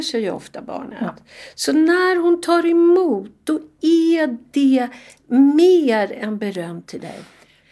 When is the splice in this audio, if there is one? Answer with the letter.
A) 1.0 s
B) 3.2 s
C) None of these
C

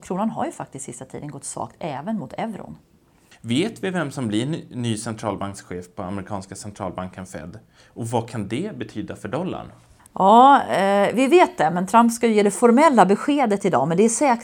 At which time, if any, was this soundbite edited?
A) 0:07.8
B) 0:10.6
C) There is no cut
C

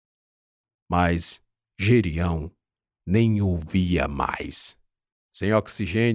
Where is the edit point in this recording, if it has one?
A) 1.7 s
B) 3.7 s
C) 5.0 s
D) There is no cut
D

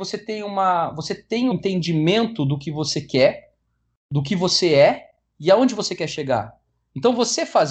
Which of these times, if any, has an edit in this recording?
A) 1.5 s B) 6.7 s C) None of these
A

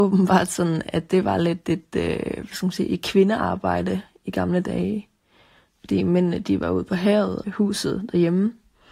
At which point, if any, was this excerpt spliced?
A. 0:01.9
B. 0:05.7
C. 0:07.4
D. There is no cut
C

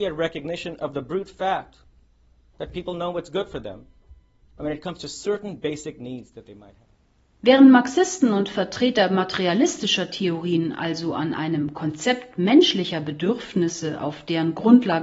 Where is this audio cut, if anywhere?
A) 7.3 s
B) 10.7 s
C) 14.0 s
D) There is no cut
D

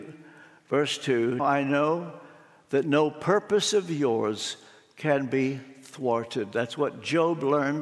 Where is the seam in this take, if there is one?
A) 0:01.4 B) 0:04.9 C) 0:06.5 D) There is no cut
A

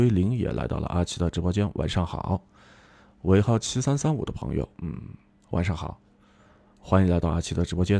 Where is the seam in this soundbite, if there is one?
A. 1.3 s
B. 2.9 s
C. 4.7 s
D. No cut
D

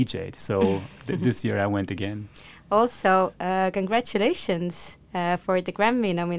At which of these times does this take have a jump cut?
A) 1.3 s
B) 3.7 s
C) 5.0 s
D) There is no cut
C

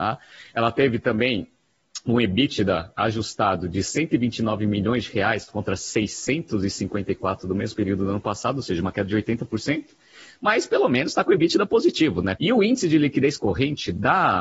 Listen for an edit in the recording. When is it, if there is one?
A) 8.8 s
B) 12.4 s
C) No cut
B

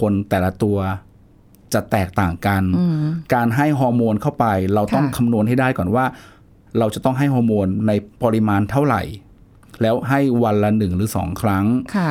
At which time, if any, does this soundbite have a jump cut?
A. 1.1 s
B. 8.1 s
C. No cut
B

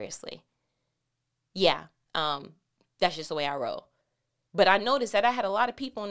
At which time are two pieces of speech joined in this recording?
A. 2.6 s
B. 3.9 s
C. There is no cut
C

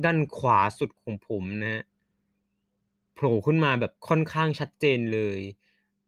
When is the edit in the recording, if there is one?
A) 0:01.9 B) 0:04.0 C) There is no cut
B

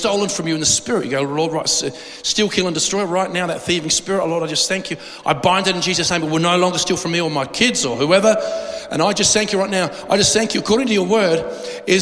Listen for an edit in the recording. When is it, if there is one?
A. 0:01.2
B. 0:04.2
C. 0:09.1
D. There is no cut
D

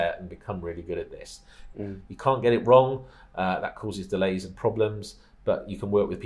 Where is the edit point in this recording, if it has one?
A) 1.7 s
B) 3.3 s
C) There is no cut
A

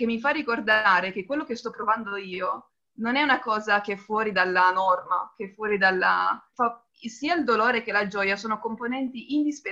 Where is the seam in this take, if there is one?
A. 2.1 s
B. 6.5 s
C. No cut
B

